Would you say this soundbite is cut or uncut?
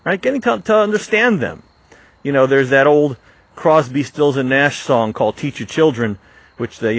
uncut